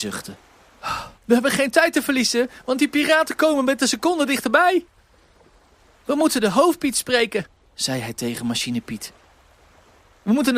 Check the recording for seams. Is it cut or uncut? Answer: cut